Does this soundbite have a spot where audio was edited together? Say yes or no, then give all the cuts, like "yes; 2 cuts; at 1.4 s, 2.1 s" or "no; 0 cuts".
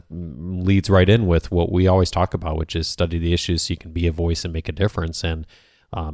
no; 0 cuts